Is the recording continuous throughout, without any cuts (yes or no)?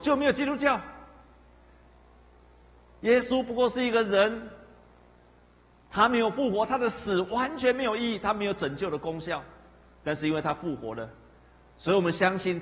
yes